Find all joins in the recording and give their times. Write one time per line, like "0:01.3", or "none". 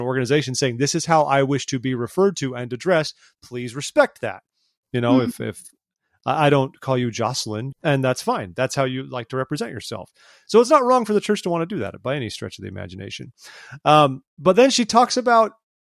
0:04.8
0:07.7
0:14.3